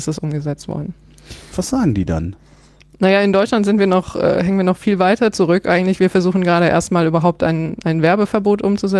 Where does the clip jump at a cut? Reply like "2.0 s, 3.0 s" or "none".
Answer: 1.5 s

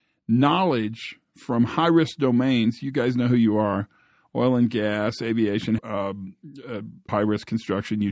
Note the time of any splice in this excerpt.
5.8 s, 7.1 s

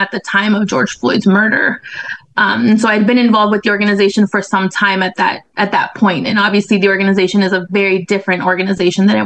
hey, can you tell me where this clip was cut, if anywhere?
none

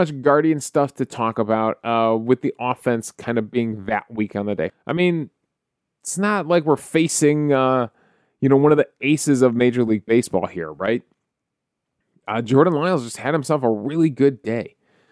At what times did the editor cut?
4.7 s

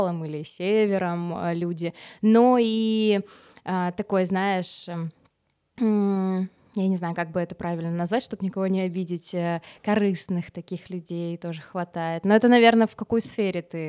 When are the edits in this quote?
none

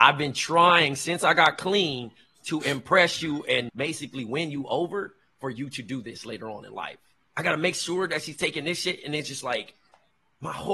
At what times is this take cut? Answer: 3.7 s, 7.3 s

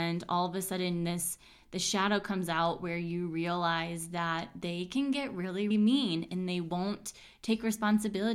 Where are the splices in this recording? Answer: 5.7 s

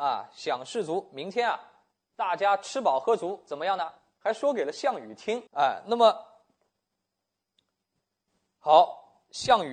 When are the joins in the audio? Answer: 4.2 s, 5.5 s

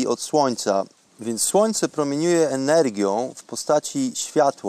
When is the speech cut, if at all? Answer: 1.0 s

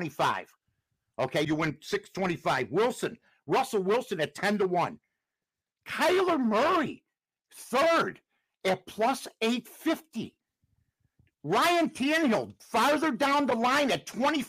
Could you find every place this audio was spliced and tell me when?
1.4 s

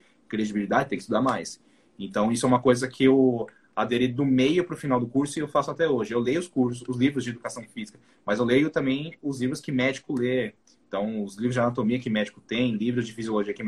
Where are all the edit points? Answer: none

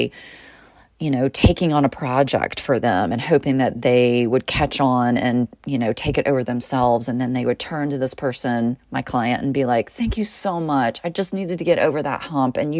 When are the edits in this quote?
none

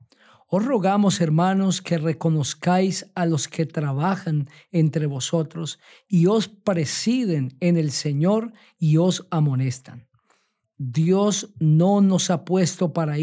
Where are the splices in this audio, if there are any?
10.6 s

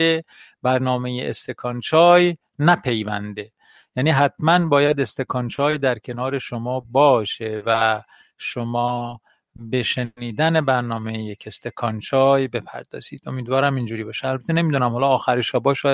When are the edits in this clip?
none

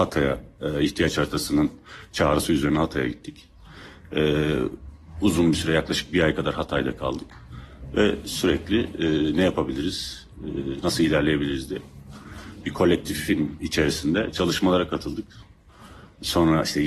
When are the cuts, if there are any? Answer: none

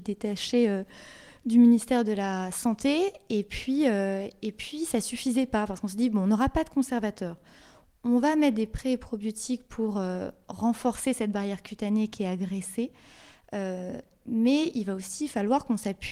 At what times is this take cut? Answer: none

